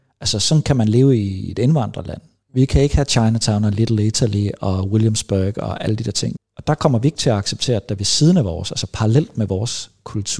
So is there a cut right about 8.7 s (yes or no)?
no